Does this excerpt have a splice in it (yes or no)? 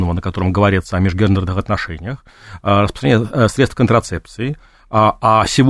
no